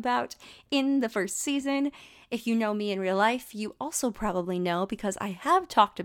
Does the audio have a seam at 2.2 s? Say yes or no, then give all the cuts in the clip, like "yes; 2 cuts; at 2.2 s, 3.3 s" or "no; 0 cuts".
no; 0 cuts